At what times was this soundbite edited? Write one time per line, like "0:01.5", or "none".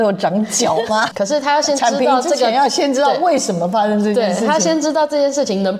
0:01.1